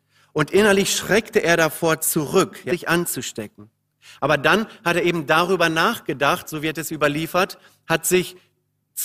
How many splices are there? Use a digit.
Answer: 1